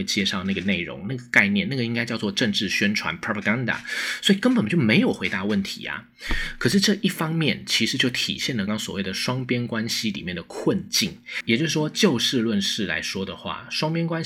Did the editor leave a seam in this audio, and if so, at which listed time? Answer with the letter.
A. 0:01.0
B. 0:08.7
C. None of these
B